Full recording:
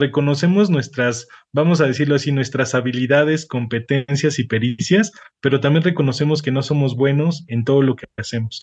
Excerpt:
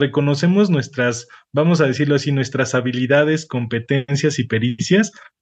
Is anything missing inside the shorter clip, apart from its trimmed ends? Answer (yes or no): no